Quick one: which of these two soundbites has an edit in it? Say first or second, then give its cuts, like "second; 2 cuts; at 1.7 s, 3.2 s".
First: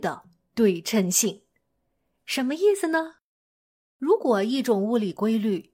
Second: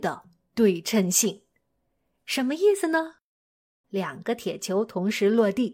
second; 1 cut; at 3.8 s